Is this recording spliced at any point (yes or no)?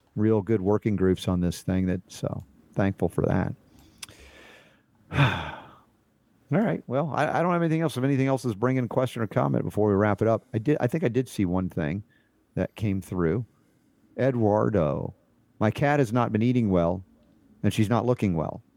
yes